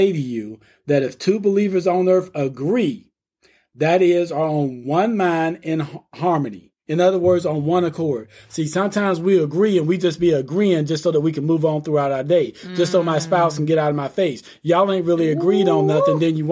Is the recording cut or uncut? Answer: uncut